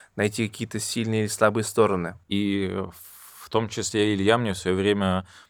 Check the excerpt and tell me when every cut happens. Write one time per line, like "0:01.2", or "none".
0:02.2